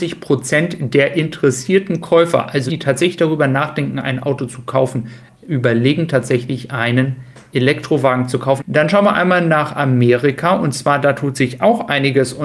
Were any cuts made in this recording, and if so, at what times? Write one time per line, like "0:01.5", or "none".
0:02.7
0:08.6